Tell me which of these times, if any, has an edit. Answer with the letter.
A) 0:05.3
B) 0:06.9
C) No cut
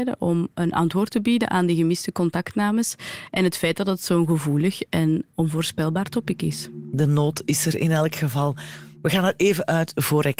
A